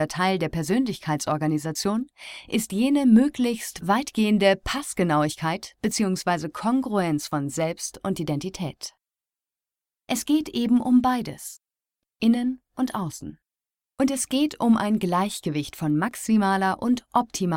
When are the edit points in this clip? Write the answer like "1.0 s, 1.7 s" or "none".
13.9 s

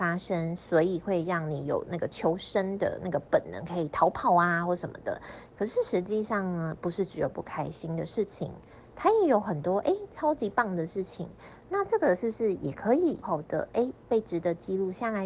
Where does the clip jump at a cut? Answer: 13.2 s

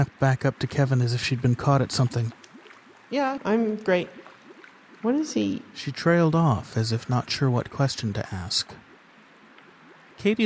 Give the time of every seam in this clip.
3.4 s

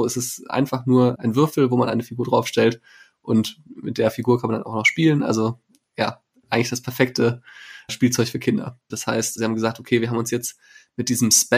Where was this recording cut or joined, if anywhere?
8.9 s

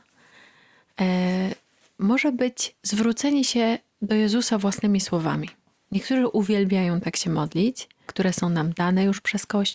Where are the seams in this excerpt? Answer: 8.1 s

